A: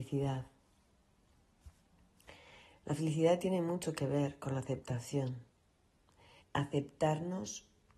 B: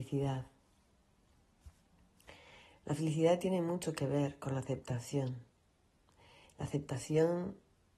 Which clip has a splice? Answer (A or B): A